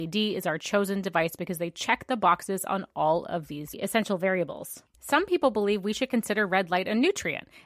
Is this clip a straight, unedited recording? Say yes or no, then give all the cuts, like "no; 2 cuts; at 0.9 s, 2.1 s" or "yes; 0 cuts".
no; 2 cuts; at 3.7 s, 4.9 s